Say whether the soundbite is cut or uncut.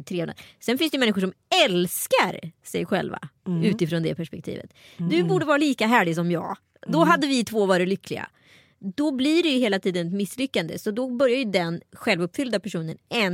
cut